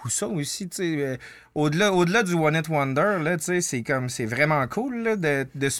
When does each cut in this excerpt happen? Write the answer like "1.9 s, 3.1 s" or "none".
none